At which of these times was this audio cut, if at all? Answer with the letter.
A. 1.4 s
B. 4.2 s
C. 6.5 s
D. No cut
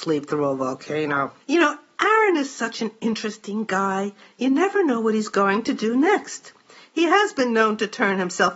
A